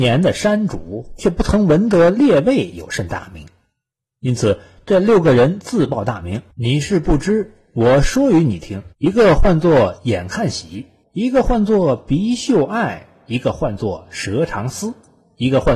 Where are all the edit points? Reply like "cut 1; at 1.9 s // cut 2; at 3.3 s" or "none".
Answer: cut 1; at 6.5 s // cut 2; at 8.9 s // cut 3; at 11.0 s